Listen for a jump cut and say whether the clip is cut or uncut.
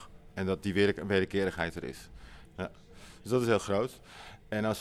cut